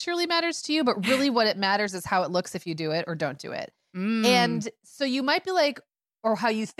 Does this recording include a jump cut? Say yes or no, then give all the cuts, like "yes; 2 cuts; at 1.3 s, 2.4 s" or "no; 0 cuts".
no; 0 cuts